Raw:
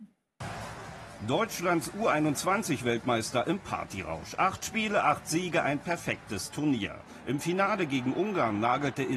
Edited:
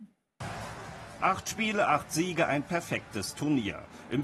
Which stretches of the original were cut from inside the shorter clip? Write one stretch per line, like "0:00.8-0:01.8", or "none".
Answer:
0:01.2-0:04.4